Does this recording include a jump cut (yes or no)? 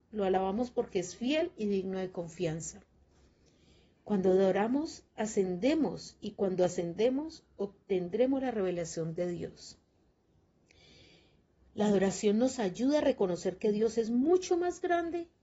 no